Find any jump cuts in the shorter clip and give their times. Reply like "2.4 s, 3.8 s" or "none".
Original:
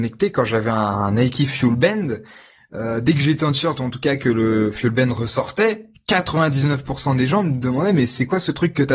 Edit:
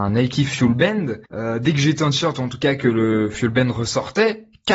1.2 s